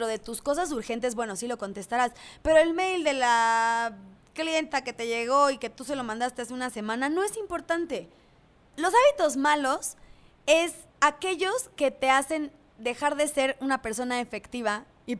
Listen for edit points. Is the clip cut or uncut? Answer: cut